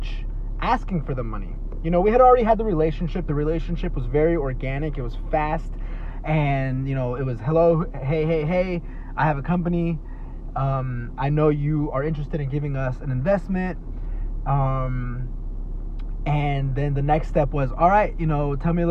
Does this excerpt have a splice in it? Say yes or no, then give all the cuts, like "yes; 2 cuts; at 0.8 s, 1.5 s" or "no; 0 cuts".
no; 0 cuts